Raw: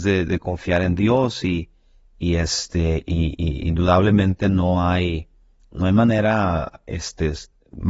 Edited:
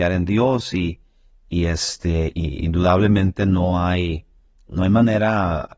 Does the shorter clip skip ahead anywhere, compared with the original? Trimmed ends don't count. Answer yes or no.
yes